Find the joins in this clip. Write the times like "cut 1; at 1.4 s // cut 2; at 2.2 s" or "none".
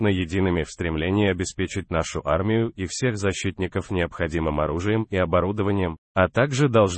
cut 1; at 6.0 s